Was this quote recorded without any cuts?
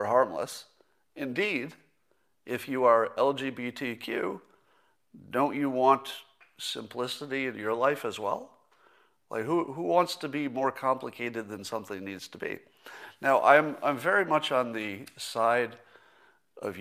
yes; 0 cuts

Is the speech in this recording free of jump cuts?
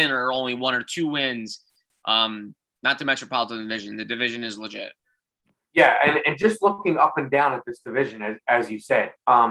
yes; 0 cuts

